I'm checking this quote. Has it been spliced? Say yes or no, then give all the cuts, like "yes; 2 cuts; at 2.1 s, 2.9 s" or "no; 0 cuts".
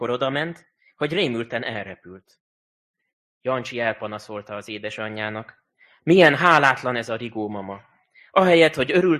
no; 0 cuts